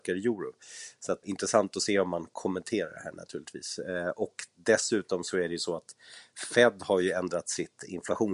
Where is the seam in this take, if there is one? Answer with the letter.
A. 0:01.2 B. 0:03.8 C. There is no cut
A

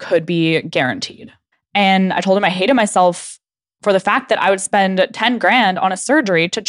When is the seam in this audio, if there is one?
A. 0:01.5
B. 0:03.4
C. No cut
A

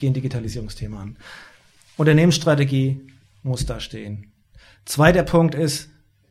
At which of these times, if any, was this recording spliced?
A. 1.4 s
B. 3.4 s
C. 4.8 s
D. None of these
D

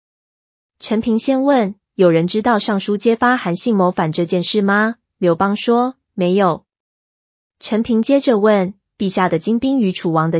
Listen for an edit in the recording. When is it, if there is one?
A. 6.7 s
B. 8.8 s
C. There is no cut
A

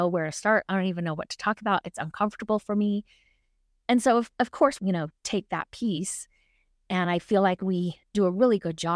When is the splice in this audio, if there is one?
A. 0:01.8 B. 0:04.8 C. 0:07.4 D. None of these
B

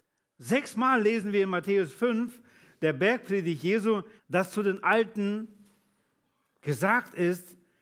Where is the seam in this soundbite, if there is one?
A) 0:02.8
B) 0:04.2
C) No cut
B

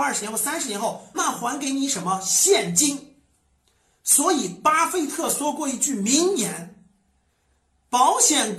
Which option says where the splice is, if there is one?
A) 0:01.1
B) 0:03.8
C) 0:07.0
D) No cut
A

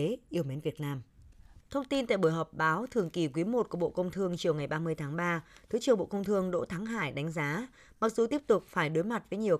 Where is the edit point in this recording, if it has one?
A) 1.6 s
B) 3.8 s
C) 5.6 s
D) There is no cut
A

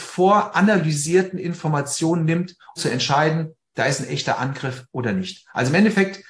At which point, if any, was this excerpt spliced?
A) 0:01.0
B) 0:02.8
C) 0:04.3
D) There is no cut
B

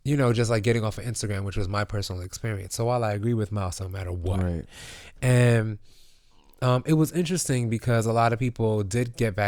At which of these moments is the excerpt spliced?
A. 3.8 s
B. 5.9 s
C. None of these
A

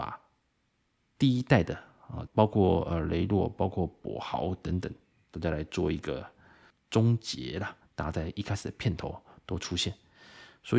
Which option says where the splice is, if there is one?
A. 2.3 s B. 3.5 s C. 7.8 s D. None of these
A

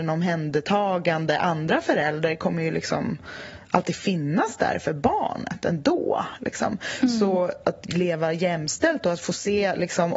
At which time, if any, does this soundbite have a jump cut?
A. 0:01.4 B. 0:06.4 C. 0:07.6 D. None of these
C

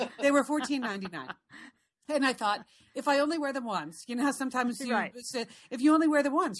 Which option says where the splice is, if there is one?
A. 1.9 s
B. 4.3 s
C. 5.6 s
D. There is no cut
D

